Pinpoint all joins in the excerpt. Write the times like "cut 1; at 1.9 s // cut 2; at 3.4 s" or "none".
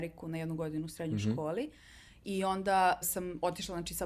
cut 1; at 3.0 s